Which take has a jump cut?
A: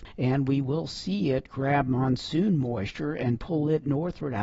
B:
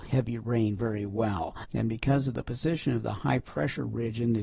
B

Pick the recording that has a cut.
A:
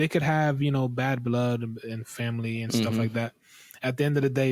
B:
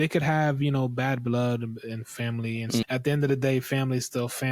B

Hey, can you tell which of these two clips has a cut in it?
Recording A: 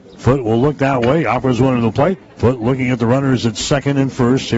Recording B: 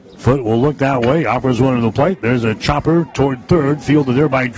A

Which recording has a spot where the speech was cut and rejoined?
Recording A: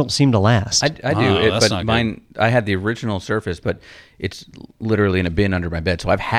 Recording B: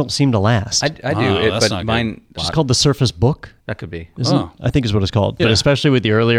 B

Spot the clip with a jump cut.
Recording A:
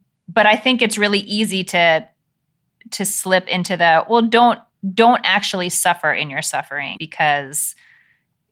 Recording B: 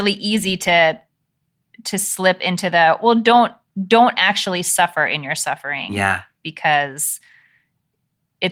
A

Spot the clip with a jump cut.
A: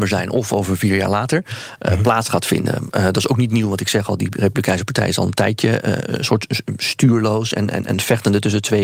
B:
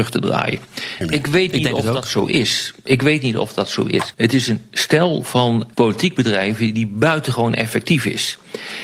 B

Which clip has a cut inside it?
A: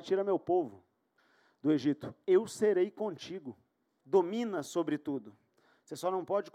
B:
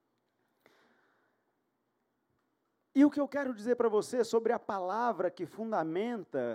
A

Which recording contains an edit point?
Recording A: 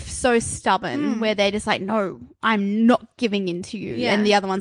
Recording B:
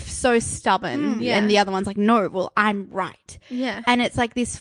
B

